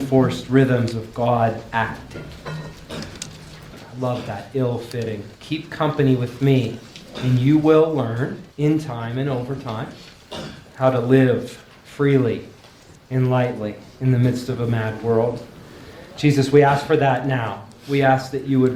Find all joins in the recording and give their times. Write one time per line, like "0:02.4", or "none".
0:03.7
0:05.3
0:08.5